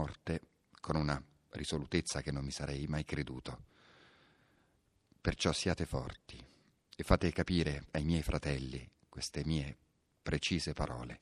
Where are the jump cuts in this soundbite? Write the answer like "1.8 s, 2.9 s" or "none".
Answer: none